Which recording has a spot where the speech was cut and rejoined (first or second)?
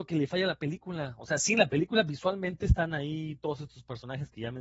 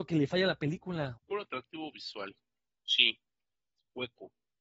second